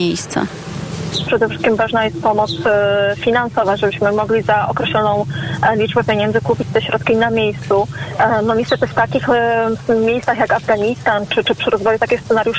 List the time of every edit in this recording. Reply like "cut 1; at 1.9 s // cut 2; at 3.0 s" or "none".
cut 1; at 1.2 s

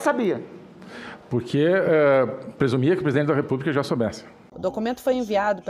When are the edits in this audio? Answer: none

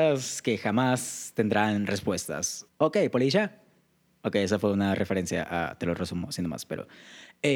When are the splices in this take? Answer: cut 1; at 2.7 s

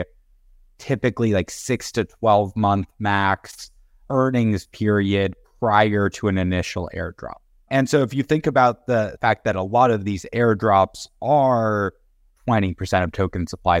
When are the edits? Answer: none

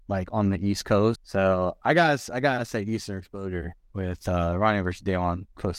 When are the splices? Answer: cut 1; at 1.1 s

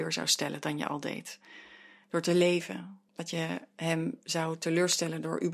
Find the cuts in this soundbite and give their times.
cut 1; at 3.1 s

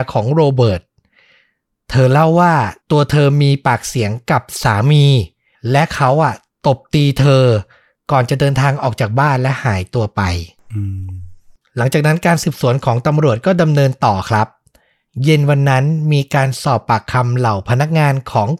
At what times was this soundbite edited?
cut 1; at 2.8 s

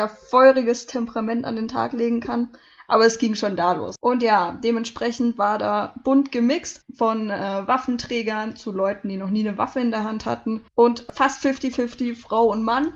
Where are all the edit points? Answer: cut 1; at 4.0 s // cut 2; at 6.8 s // cut 3; at 10.7 s

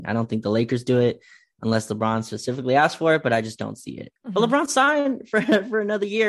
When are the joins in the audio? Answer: cut 1; at 4.2 s

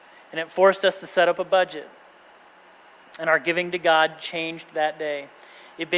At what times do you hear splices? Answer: none

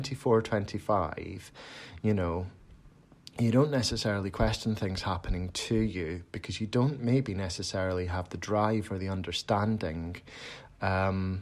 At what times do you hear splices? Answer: none

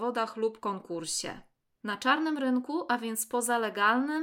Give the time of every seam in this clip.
cut 1; at 1.8 s

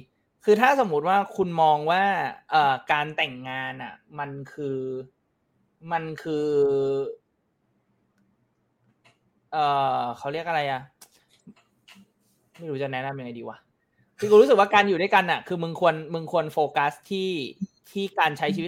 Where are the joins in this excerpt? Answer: none

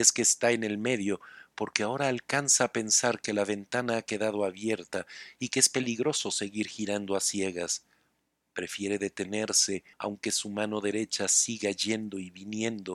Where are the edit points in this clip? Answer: cut 1; at 9.9 s

